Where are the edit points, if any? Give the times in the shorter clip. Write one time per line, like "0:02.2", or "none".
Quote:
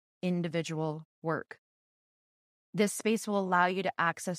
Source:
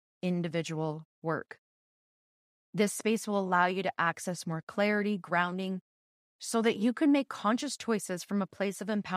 none